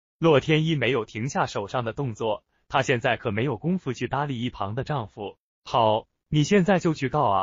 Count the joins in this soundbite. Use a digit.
1